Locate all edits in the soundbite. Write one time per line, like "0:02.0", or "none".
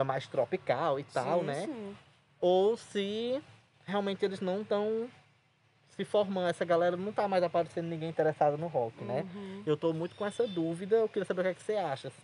none